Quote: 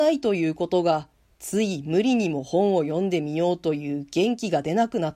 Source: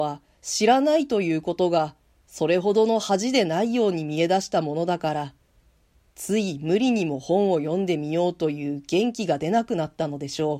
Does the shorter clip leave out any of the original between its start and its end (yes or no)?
yes